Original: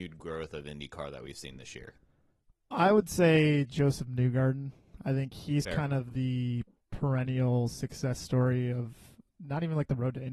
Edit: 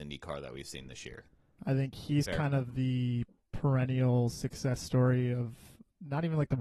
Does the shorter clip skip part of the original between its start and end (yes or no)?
yes